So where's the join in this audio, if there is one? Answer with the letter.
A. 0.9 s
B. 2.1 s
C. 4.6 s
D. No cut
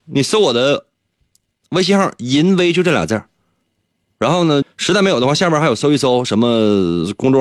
C